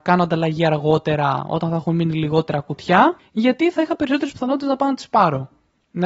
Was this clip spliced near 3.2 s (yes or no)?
yes